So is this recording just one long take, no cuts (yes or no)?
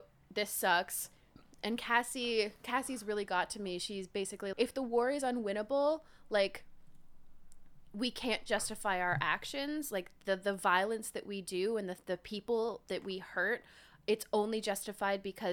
no